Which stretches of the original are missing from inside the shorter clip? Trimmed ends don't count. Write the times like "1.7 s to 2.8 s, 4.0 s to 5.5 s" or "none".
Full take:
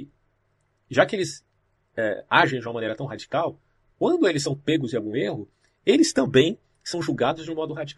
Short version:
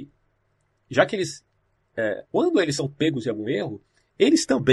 2.3 s to 3.9 s